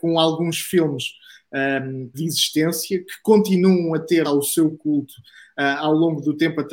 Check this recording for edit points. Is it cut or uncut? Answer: cut